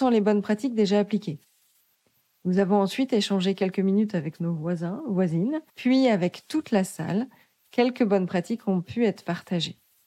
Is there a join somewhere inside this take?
yes; 1 cut; at 5.7 s

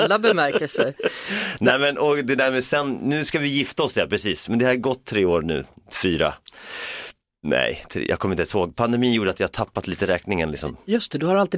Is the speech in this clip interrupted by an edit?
no; 0 cuts

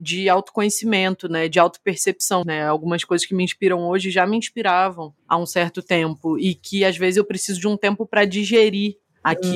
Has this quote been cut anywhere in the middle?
yes; 2 cuts; at 2.4 s, 5.2 s

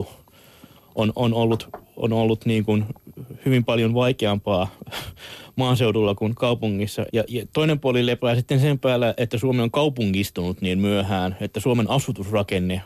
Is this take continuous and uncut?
no; 1 cut; at 7.1 s

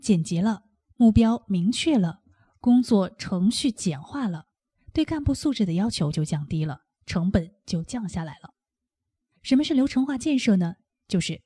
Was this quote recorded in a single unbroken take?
no; 1 cut; at 9.4 s

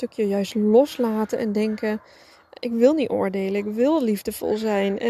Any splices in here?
no; 0 cuts

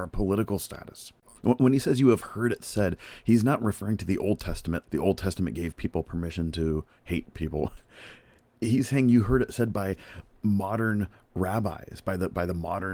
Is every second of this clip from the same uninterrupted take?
no; 2 cuts; at 1.4 s, 4.8 s

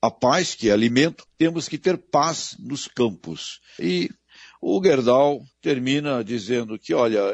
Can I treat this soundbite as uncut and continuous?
no; 3 cuts; at 1.3 s, 3.8 s, 5.5 s

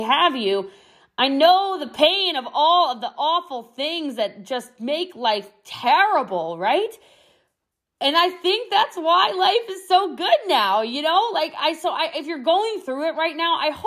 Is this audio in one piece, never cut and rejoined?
yes; 0 cuts

